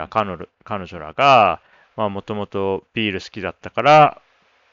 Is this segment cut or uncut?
uncut